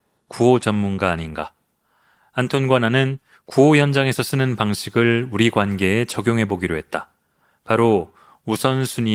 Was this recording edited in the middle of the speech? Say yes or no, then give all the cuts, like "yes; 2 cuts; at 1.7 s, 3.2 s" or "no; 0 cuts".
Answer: no; 0 cuts